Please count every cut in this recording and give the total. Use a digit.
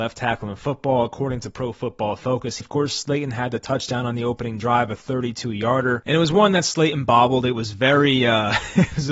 1